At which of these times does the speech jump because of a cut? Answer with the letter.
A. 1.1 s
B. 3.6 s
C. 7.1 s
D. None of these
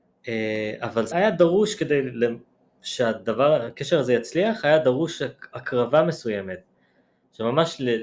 A